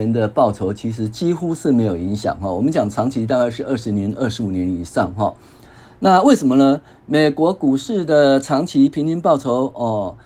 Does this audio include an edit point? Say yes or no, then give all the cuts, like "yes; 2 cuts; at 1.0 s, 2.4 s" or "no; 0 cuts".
no; 0 cuts